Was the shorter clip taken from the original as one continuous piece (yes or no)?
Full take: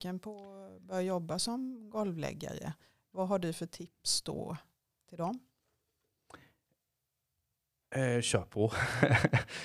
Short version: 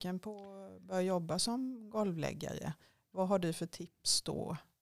yes